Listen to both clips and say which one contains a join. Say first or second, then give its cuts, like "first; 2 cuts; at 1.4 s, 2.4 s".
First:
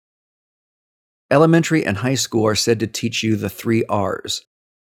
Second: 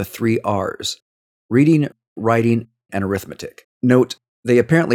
second; 1 cut; at 3.7 s